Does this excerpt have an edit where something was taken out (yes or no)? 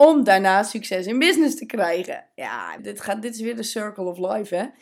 yes